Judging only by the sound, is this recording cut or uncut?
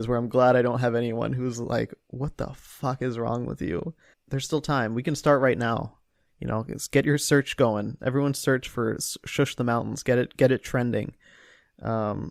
cut